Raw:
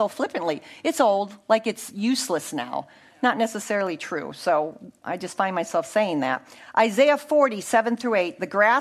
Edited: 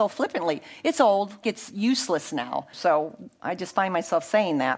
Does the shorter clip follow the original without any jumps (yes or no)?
no